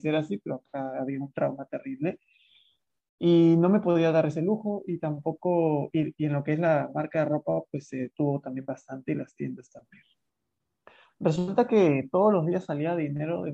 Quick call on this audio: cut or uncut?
uncut